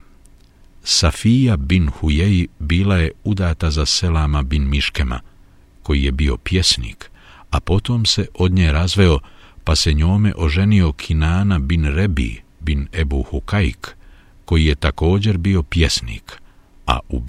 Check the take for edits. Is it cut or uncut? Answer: uncut